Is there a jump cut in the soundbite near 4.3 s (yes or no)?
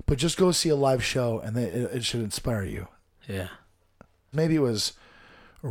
yes